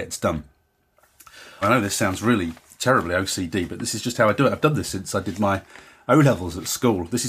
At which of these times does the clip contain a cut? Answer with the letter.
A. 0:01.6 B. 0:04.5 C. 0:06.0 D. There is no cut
A